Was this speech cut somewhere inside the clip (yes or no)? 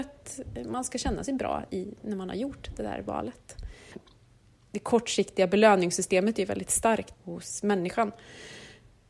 yes